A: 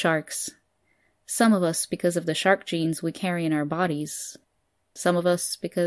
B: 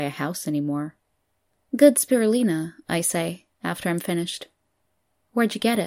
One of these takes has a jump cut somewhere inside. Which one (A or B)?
B